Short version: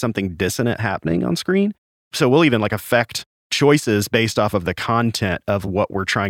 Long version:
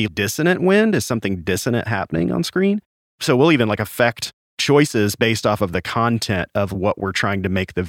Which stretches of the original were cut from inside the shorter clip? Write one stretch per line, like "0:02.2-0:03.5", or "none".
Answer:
none